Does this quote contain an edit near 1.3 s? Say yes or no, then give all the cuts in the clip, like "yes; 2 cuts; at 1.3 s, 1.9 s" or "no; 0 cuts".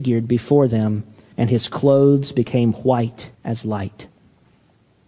yes; 2 cuts; at 1.3 s, 3.3 s